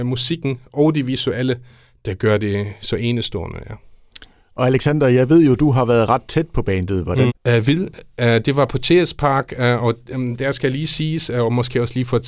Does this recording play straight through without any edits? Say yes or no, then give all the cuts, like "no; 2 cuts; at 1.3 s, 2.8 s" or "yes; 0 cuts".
no; 1 cut; at 7.3 s